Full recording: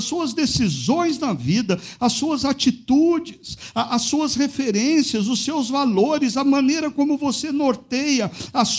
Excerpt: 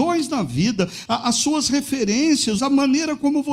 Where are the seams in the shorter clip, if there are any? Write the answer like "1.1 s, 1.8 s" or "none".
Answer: 1.1 s, 2.6 s